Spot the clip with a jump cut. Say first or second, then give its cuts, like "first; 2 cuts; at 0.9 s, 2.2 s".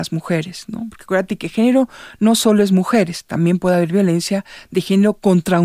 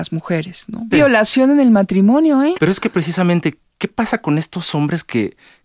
second; 2 cuts; at 0.9 s, 2.5 s